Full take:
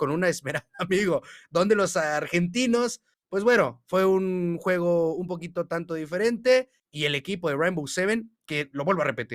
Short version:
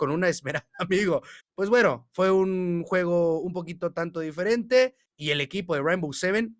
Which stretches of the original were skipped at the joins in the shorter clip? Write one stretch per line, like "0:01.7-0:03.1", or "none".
0:01.4-0:03.1